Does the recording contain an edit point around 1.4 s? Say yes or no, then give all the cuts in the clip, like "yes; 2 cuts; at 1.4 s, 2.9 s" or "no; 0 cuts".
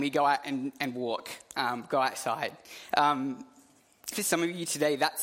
no; 2 cuts; at 2.9 s, 4.1 s